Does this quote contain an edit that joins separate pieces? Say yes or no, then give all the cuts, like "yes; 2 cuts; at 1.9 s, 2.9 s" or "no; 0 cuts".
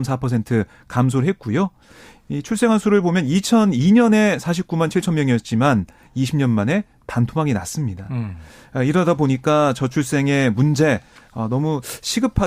no; 0 cuts